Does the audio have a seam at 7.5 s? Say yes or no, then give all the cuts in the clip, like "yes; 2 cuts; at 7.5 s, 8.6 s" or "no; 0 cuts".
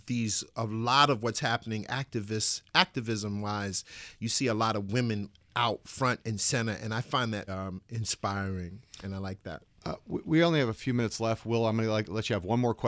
yes; 1 cut; at 7.5 s